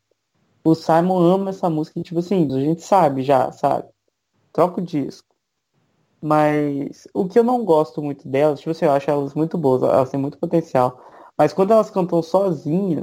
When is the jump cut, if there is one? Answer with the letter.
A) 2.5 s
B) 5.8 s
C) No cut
A